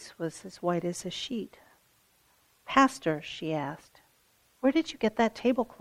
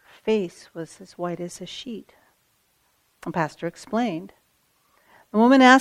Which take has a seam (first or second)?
second